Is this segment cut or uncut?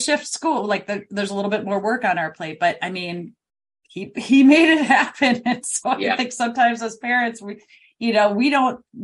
uncut